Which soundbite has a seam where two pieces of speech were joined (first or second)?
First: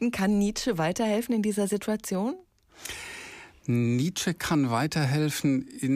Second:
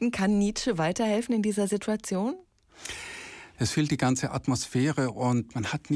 second